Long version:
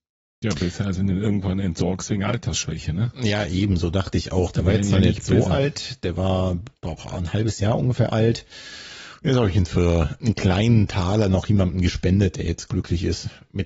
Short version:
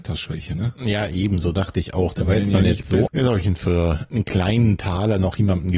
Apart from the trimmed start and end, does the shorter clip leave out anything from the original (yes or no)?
yes